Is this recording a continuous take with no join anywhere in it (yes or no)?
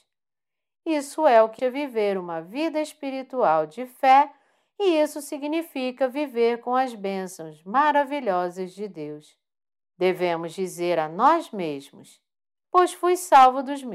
no